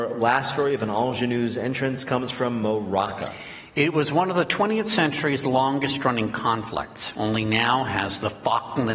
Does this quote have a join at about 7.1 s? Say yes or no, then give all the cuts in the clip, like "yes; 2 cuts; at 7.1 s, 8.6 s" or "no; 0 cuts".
no; 0 cuts